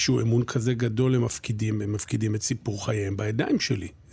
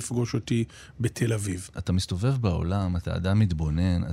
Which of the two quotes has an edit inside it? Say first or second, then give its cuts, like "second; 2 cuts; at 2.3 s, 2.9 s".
second; 1 cut; at 1.7 s